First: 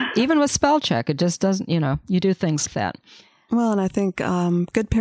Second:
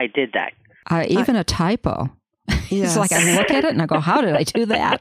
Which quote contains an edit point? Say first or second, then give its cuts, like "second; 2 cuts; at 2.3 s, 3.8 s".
first; 1 cut; at 2.7 s